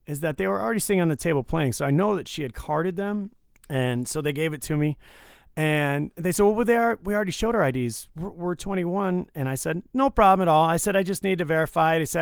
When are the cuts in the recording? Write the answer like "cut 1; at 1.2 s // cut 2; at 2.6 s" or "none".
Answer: cut 1; at 3.6 s